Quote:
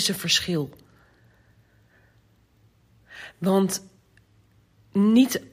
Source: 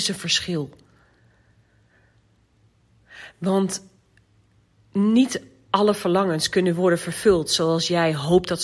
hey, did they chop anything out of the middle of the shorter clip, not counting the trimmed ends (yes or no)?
no